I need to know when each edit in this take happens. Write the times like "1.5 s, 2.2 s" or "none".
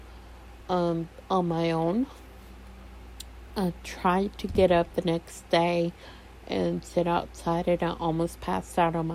none